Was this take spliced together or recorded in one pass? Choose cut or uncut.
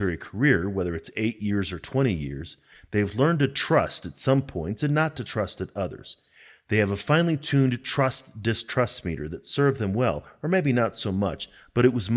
uncut